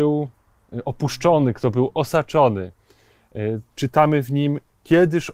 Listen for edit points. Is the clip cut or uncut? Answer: uncut